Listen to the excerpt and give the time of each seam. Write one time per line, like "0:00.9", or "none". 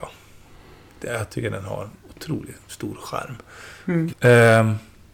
0:04.1